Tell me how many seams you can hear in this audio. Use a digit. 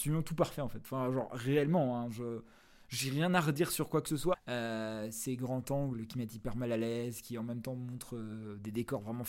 1